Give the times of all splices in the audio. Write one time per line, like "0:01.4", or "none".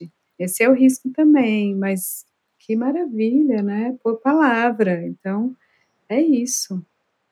none